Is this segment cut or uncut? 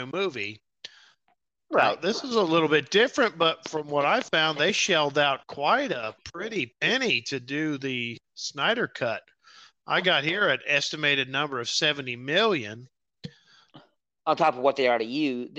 uncut